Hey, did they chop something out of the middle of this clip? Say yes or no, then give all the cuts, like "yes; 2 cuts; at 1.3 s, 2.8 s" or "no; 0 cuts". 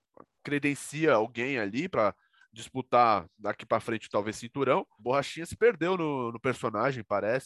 yes; 1 cut; at 5.0 s